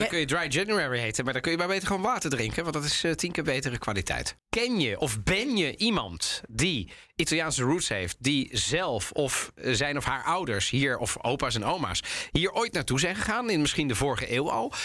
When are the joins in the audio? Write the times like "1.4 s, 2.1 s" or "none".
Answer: 4.4 s